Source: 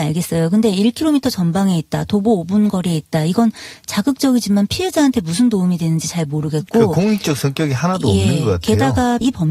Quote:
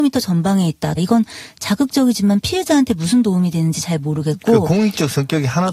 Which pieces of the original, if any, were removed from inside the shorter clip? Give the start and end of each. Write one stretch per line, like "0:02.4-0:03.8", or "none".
0:02.1-0:03.2

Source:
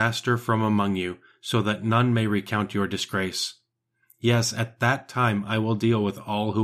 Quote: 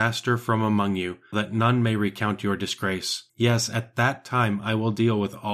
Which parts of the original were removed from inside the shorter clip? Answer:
0:01.3-0:01.6
0:03.6-0:04.1

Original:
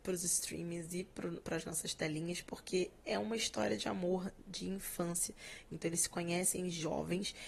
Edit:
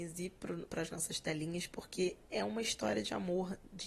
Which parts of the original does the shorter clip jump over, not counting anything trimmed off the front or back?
none

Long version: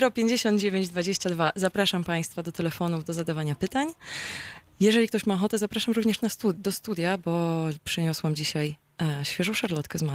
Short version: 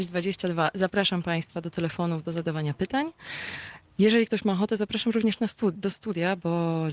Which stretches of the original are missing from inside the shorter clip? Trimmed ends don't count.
none

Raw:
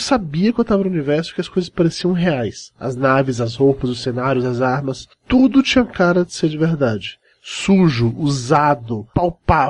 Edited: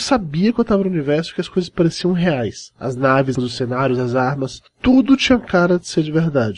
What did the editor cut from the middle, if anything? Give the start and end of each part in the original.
0:03.4-0:03.8

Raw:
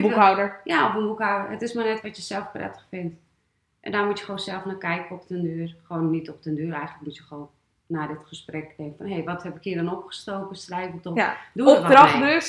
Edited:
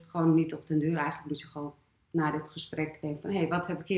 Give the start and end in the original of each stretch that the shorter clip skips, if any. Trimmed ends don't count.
none

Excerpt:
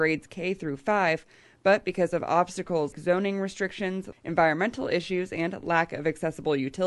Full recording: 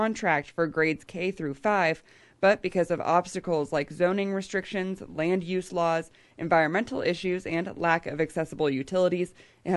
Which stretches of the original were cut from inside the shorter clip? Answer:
0:03.7-0:03.9
0:05.1-0:06.3

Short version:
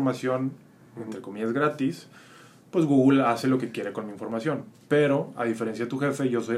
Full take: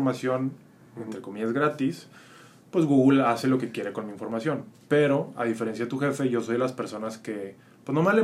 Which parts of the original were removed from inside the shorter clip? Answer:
none

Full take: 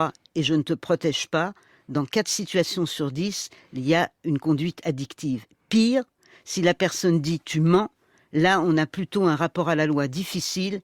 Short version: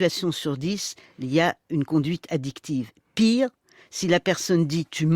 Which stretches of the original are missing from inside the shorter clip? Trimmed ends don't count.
none

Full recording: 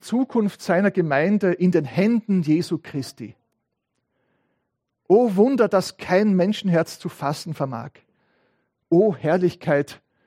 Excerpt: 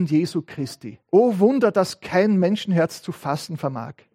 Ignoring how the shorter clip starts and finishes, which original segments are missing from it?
0:03.4-0:05.0

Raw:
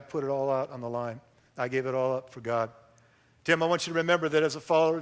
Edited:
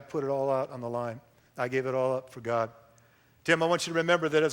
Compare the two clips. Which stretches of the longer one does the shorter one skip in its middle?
none

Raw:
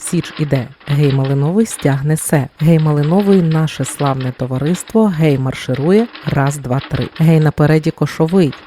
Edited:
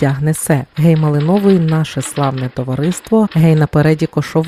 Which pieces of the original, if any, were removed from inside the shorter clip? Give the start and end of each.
0:05.1-0:07.1

